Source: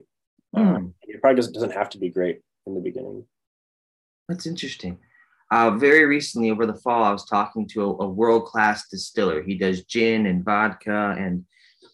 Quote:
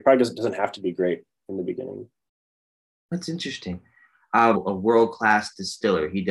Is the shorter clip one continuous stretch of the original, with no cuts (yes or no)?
no